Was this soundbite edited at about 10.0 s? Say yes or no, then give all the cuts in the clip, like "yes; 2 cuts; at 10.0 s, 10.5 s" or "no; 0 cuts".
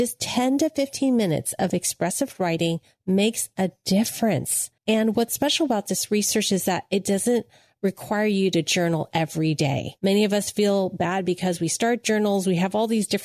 yes; 2 cuts; at 4.8 s, 10.0 s